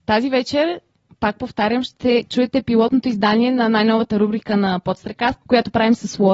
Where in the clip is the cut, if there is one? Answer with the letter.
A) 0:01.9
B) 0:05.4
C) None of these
B